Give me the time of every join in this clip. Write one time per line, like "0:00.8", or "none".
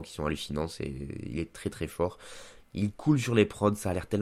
none